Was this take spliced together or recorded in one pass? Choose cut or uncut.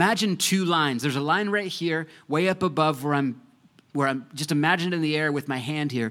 uncut